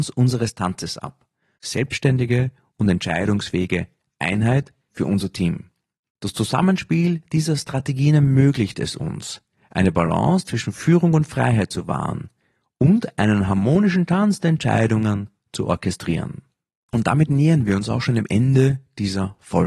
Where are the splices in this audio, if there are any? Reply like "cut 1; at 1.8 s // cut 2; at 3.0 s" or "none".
cut 1; at 1.6 s // cut 2; at 4.9 s